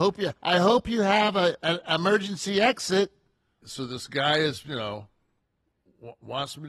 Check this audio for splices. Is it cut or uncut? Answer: cut